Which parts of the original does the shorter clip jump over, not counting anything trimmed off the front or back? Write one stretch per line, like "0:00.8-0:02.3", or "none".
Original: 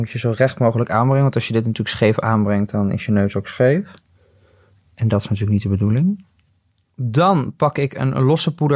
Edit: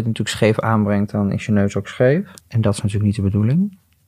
0:04.0-0:04.9